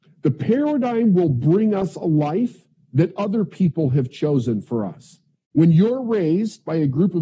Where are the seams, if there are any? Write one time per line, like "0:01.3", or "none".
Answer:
0:05.4